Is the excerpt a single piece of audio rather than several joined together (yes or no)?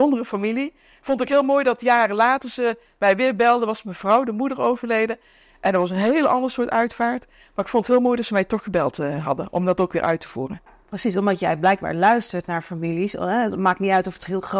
yes